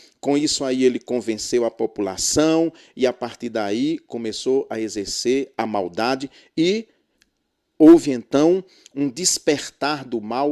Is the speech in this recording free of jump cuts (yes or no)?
yes